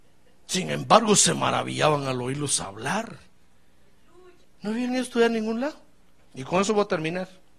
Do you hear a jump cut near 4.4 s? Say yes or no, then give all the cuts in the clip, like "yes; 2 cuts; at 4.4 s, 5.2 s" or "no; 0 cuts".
yes; 2 cuts; at 4.4 s, 6.2 s